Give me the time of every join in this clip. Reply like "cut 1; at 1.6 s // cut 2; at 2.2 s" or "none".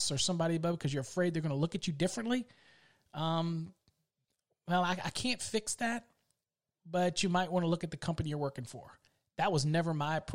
none